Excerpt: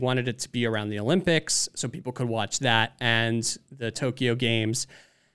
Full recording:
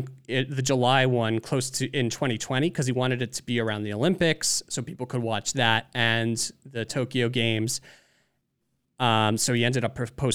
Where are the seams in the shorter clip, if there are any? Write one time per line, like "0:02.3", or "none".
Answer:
none